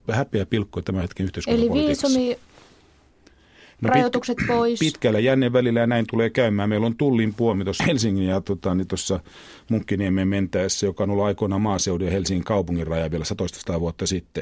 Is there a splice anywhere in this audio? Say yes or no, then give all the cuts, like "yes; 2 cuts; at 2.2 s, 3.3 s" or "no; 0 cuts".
yes; 1 cut; at 7.8 s